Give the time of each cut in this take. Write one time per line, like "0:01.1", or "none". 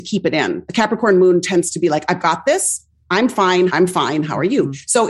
0:03.7